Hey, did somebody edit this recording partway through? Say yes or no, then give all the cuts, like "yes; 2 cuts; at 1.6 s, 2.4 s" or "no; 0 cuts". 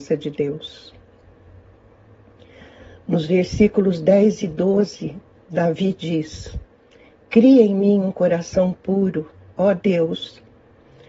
no; 0 cuts